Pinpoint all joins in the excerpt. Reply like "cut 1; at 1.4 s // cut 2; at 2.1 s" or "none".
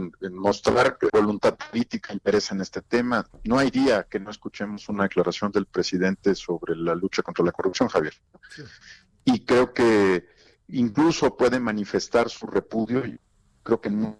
cut 1; at 1.1 s